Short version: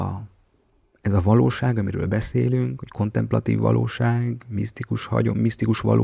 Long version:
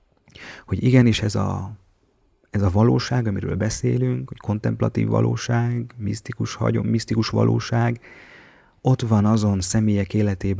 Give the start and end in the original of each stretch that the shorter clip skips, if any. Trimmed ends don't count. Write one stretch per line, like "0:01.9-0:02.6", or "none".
none